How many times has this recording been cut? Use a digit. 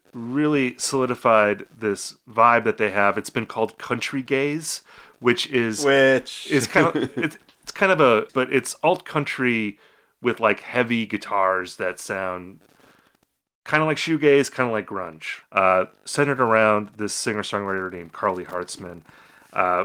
2